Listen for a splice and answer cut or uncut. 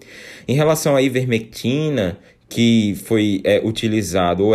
cut